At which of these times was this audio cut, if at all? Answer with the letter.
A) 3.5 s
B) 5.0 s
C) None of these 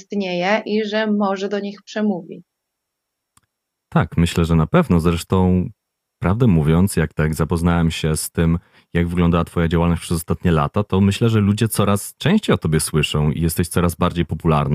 C